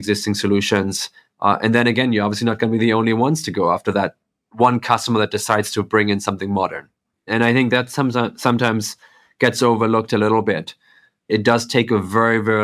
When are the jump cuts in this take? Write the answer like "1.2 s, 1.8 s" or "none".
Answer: 7.1 s